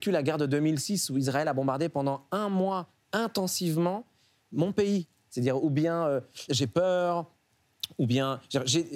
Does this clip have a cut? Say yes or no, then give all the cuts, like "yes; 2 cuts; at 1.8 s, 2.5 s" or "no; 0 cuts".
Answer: yes; 2 cuts; at 5.3 s, 6.5 s